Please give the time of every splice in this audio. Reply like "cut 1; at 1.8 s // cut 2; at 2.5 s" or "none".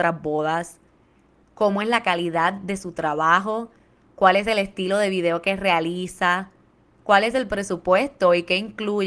none